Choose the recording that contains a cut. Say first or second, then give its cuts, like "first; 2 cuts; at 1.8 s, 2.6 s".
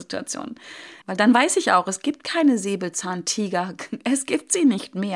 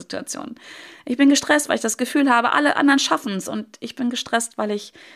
first; 1 cut; at 1.0 s